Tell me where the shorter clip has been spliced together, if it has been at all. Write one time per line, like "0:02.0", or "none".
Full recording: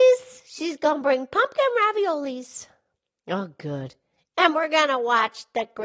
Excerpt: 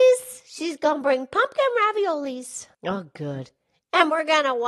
0:02.7